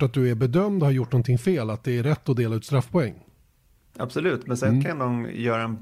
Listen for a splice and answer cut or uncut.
uncut